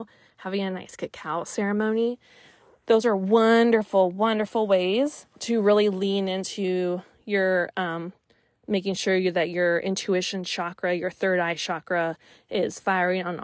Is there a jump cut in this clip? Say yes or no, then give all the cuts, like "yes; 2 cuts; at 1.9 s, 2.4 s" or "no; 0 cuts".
no; 0 cuts